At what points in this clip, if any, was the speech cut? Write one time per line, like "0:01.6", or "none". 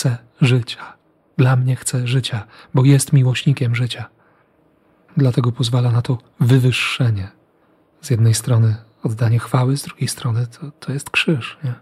none